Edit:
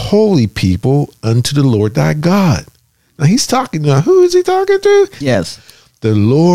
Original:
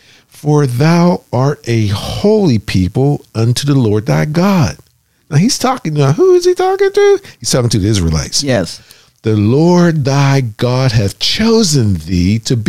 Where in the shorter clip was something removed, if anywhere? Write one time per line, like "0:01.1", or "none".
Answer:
0:05.2

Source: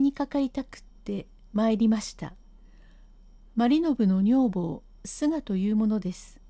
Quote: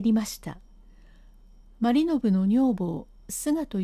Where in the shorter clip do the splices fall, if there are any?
none

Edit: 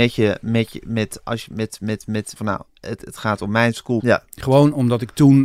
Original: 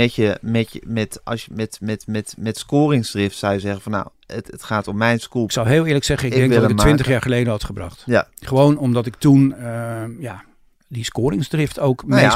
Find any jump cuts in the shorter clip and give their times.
0:02.4
0:04.0

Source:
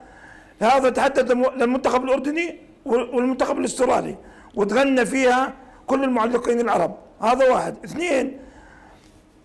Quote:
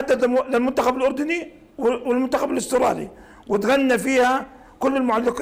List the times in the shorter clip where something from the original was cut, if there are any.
none

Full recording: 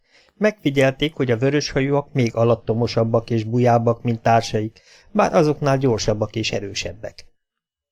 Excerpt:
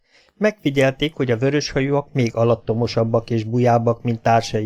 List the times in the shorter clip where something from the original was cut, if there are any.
none

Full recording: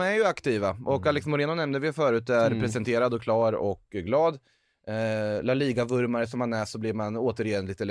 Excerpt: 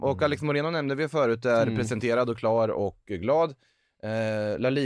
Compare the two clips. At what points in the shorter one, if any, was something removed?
none

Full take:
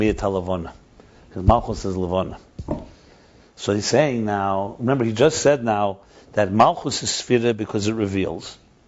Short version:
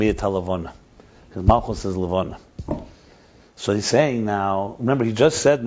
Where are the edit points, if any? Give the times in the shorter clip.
none

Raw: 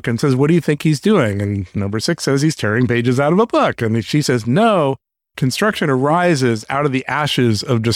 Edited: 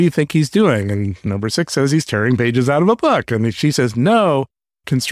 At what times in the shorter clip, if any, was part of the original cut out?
none

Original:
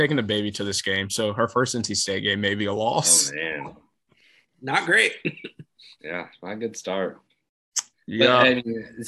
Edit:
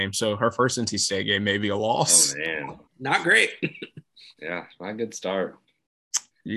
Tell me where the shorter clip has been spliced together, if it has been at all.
0:02.9

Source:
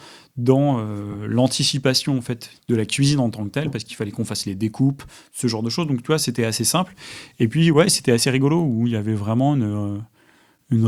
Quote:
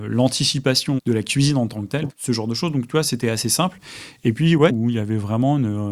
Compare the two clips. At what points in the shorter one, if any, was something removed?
0:01.0
0:02.1
0:04.7

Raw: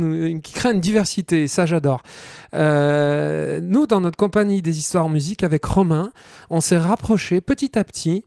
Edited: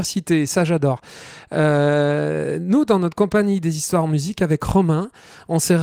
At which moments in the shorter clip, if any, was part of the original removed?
none

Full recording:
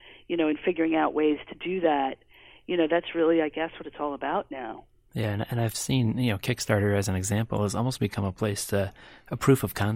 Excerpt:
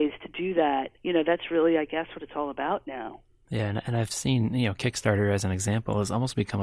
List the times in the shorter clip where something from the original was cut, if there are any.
0:01.0

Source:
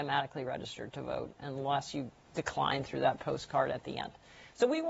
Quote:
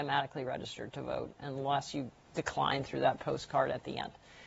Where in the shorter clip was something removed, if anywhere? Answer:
none

